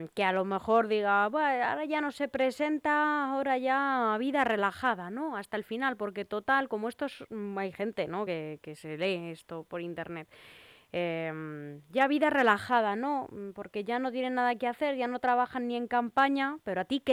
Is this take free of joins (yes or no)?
yes